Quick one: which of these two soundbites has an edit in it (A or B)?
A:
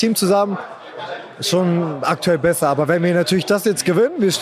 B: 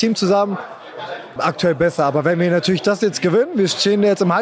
B